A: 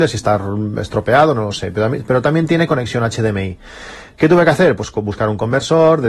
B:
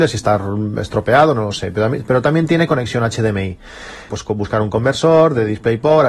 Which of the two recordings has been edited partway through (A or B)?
B